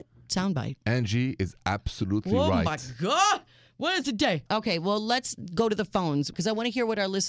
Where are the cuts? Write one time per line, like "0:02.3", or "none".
0:04.5